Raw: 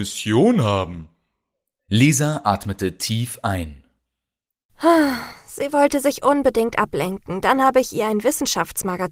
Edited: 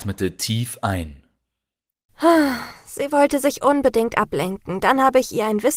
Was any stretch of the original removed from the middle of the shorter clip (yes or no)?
no